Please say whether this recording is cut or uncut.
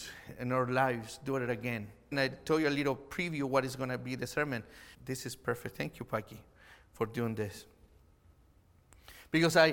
cut